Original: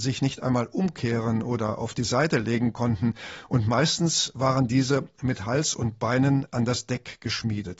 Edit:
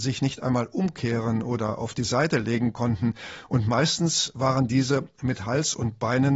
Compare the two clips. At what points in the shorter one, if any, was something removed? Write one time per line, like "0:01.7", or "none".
none